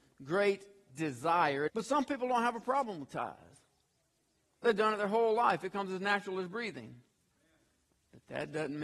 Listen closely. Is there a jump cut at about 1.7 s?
yes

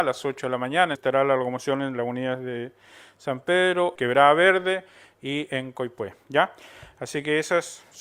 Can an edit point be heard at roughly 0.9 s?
yes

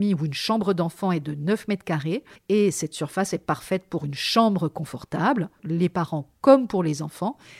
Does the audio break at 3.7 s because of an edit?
no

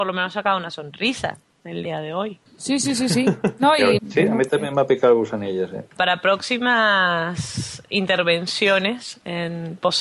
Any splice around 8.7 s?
no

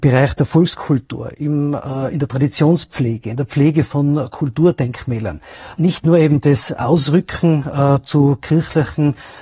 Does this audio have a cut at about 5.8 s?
yes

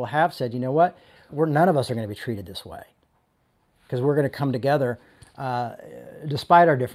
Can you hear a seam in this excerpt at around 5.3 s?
no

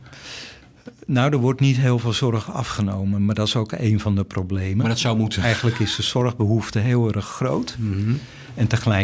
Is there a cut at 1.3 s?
no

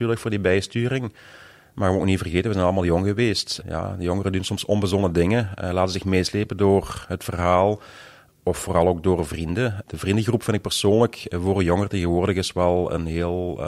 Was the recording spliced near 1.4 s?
no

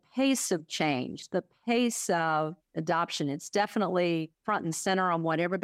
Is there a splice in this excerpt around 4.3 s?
yes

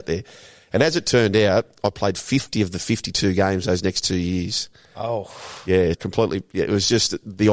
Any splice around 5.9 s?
yes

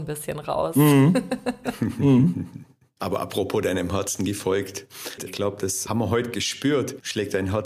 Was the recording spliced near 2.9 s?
no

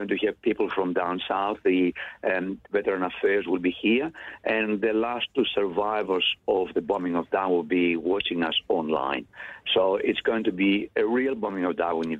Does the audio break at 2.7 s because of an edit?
yes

